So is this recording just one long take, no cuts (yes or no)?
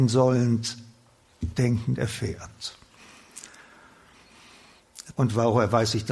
no